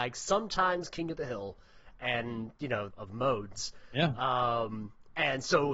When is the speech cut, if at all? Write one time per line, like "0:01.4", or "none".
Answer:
0:02.9